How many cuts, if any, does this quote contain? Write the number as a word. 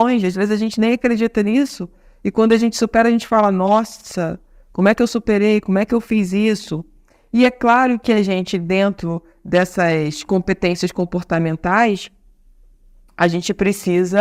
zero